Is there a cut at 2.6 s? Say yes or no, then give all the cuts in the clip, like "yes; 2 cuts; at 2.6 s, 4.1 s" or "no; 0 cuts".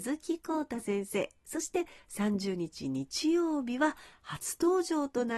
no; 0 cuts